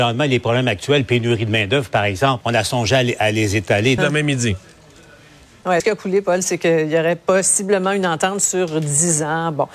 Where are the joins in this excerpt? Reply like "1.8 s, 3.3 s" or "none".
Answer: 2.4 s, 4.0 s, 5.8 s